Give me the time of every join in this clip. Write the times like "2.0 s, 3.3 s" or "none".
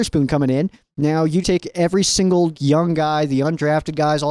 1.4 s, 2.5 s

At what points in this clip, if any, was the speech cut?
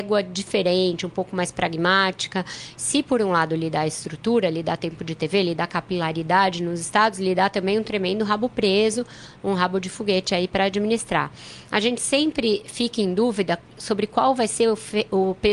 2.7 s

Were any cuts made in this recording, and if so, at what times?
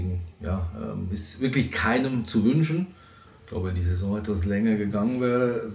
3.3 s

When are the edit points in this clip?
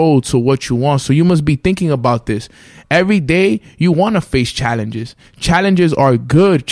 none

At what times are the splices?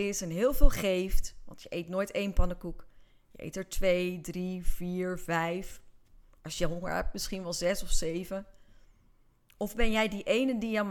none

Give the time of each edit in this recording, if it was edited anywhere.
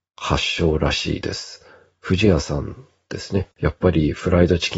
3.5 s

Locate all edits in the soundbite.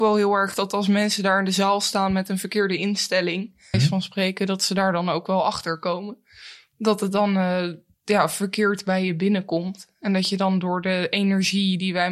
3.7 s

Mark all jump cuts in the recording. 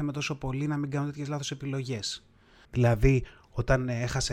2.7 s

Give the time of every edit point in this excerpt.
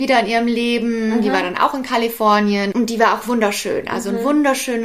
2.7 s

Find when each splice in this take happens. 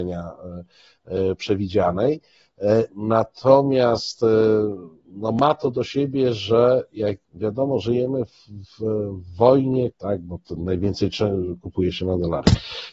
7.2 s, 9.9 s

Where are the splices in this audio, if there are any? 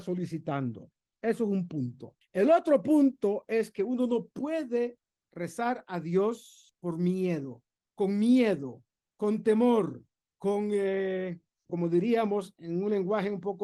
11.7 s

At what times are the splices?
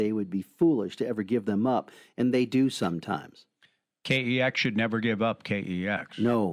none

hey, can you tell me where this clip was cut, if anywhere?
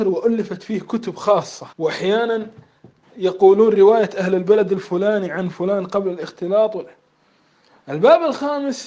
1.7 s

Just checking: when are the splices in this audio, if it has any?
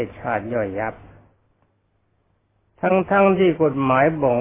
none

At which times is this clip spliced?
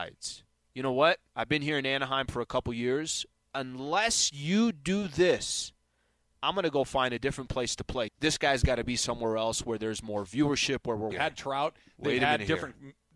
1.3 s, 8.1 s, 11.1 s

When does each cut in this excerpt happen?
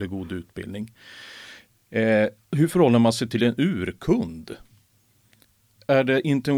none

